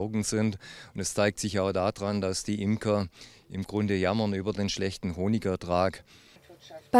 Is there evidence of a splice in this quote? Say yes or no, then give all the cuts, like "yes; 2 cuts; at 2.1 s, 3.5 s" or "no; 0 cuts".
no; 0 cuts